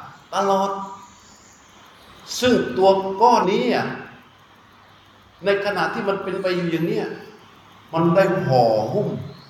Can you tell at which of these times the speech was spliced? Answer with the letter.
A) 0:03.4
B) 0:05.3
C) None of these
A